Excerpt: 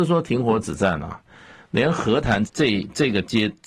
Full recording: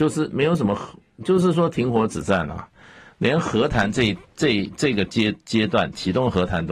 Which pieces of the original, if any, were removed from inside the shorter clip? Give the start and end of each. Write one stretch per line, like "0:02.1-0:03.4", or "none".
0:03.9-0:04.3